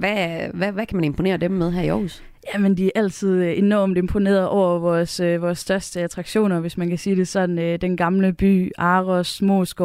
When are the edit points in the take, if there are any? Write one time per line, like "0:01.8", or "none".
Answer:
none